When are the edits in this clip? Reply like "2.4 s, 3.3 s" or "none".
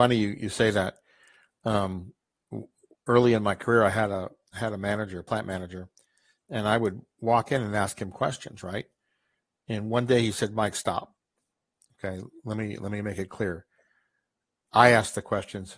none